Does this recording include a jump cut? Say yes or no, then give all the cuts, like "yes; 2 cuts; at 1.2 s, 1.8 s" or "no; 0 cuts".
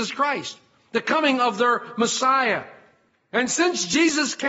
no; 0 cuts